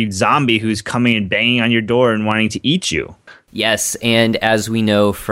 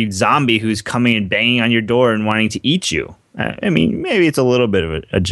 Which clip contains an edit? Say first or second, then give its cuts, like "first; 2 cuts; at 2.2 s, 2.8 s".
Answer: first; 1 cut; at 3.3 s